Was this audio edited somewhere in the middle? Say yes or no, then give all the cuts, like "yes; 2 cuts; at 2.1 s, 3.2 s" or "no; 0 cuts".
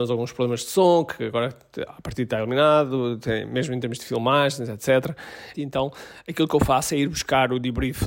yes; 1 cut; at 5.5 s